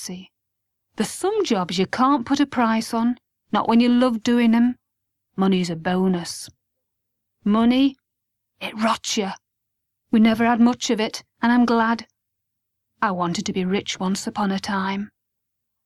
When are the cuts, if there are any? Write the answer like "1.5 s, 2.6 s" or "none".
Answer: 7.3 s

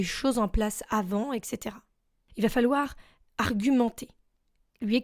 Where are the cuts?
2.3 s

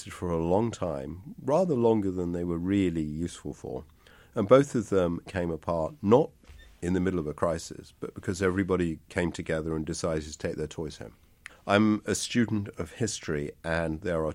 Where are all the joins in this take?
5.3 s, 11.5 s

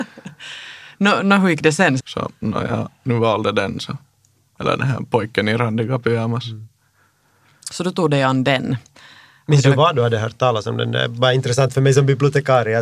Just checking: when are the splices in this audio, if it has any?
2.0 s

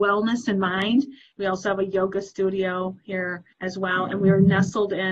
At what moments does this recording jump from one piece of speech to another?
1.3 s, 3.5 s

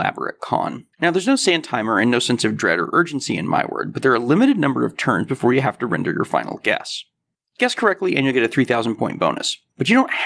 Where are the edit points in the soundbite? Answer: 0.9 s

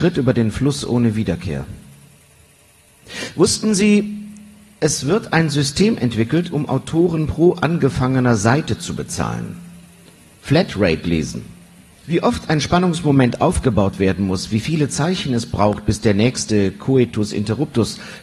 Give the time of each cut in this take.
12.0 s

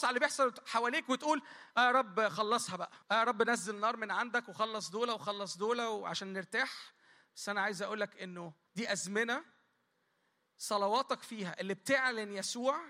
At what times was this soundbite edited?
3.0 s, 8.7 s

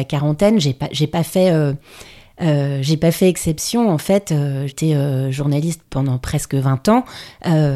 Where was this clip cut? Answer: 4.7 s, 5.8 s

